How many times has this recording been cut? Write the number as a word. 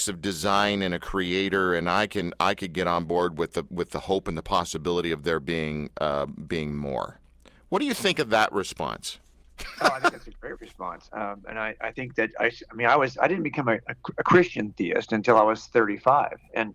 one